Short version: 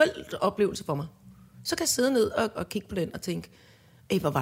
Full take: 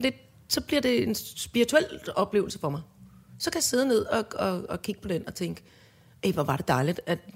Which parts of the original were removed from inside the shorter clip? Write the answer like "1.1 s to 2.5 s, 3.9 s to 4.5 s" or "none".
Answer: 4.3 s to 4.7 s